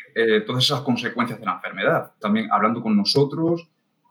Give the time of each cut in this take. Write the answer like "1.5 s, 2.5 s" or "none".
2.2 s